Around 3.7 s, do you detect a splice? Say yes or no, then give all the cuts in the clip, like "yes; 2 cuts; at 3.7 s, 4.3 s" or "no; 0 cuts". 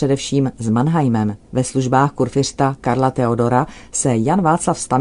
no; 1 cut; at 1.4 s